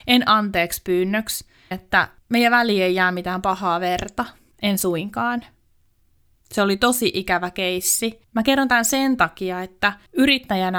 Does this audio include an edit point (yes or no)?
yes